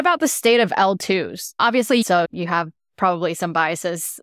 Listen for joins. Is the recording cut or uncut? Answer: cut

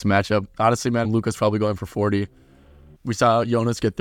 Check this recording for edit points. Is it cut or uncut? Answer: cut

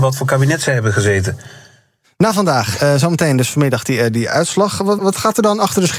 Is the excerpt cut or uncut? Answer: cut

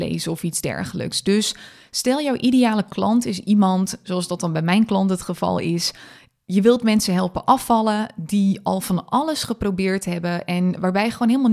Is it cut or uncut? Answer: uncut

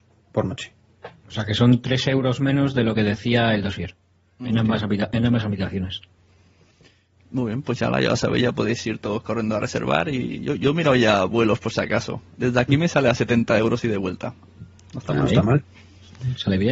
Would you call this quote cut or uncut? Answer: uncut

